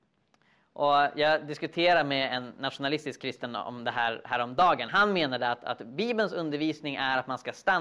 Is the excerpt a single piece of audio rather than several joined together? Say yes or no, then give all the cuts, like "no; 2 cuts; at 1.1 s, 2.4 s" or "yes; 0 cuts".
yes; 0 cuts